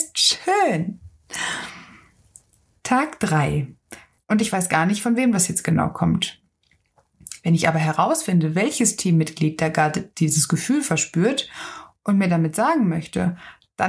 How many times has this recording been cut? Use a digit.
1